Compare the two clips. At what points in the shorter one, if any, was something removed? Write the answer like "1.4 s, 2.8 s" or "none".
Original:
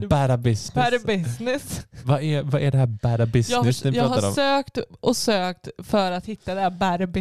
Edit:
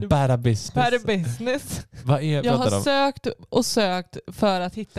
2.4 s